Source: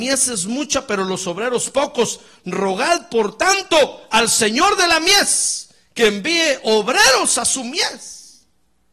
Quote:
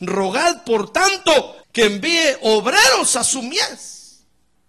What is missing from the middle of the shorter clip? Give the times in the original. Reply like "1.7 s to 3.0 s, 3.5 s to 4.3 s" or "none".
4.1 s to 5.8 s